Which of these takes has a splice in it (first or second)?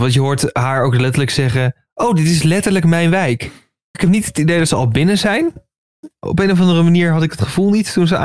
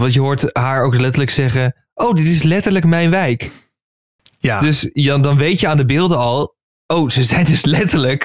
first